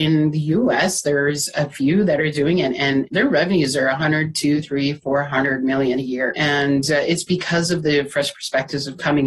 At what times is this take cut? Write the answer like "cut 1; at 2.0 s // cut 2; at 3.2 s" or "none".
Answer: none